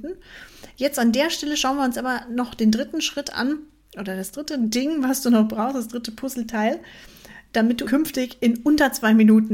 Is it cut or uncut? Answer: cut